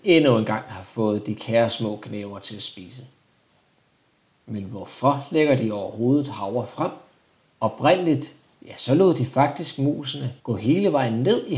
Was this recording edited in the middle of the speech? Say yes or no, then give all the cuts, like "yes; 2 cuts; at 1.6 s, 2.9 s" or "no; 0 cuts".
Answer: yes; 2 cuts; at 7.5 s, 10.4 s